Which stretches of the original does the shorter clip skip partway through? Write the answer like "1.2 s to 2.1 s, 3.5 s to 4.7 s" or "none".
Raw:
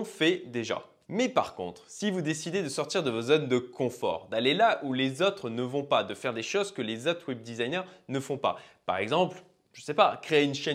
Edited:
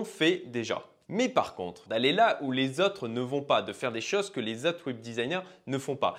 1.9 s to 4.3 s